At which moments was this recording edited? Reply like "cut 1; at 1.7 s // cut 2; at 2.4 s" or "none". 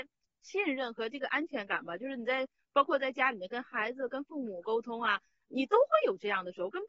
none